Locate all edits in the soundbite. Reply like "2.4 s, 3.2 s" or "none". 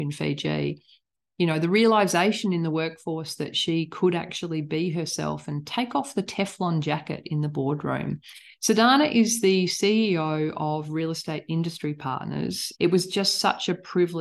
8.5 s, 12.7 s